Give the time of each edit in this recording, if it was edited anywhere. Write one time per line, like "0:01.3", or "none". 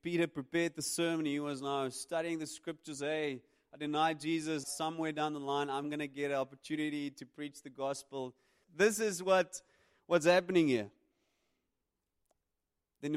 0:04.6
0:08.6